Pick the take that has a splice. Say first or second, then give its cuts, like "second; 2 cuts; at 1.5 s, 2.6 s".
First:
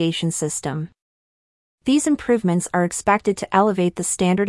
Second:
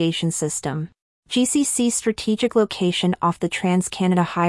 second; 1 cut; at 1.1 s